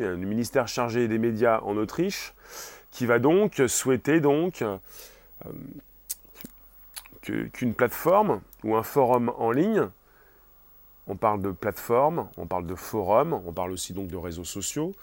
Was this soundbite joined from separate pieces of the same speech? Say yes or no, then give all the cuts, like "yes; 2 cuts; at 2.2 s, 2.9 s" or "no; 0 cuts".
no; 0 cuts